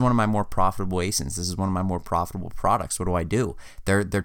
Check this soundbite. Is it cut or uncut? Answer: uncut